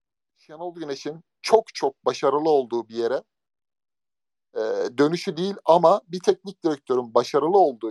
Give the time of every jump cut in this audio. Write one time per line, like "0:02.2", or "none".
none

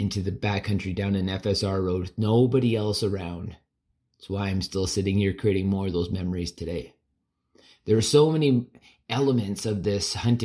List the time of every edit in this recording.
none

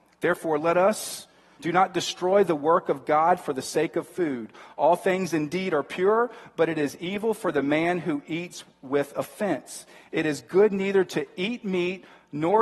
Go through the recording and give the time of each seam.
0:01.6

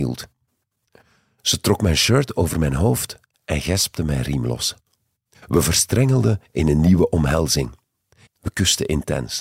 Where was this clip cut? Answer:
0:05.3
0:08.3

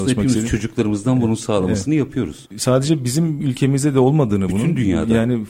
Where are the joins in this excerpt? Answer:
none

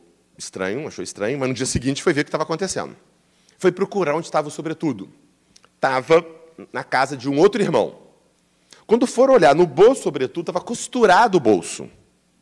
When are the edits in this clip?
0:08.7

